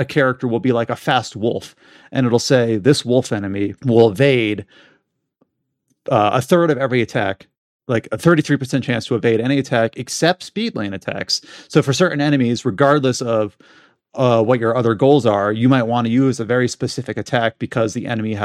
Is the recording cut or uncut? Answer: cut